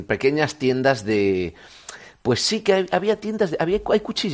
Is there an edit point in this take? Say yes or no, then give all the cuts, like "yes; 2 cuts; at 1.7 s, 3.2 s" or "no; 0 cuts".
no; 0 cuts